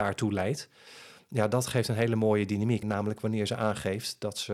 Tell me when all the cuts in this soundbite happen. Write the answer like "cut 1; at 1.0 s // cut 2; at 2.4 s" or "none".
cut 1; at 2.8 s